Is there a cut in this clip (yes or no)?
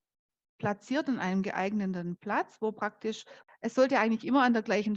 no